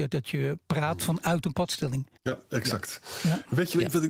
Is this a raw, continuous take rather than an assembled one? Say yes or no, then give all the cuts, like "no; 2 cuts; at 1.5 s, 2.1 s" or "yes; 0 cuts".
no; 1 cut; at 2.2 s